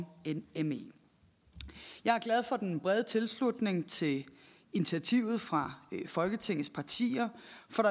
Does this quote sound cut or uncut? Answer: uncut